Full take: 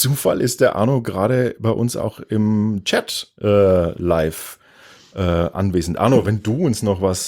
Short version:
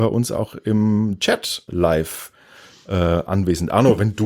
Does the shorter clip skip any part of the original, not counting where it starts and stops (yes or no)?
yes